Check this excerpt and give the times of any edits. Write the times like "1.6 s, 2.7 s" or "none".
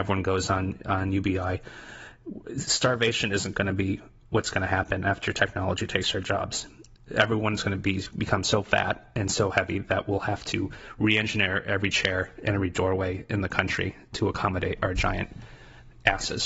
none